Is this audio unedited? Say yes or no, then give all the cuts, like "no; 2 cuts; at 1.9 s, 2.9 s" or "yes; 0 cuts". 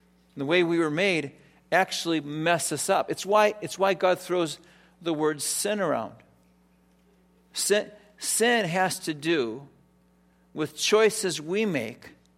yes; 0 cuts